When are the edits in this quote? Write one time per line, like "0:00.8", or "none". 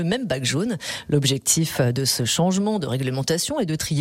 none